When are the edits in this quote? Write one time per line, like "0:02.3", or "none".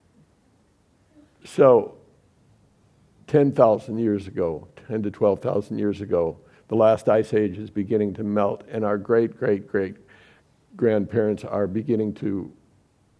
none